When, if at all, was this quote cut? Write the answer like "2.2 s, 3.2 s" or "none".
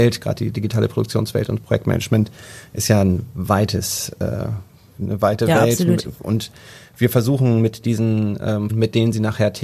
8.7 s